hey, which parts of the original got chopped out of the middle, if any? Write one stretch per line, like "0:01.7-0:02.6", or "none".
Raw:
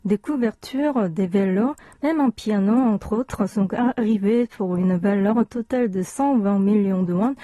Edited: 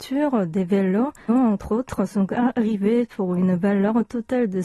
0:01.9-0:02.7